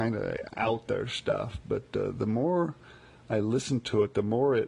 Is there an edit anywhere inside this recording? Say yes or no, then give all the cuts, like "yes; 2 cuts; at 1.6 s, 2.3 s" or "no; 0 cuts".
no; 0 cuts